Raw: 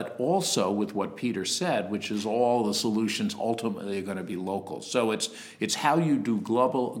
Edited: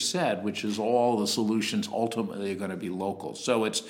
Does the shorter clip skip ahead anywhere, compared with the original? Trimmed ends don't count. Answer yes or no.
no